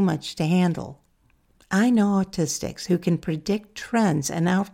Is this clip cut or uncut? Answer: uncut